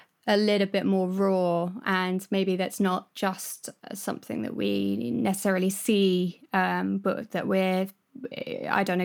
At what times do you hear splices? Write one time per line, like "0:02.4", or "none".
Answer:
0:01.8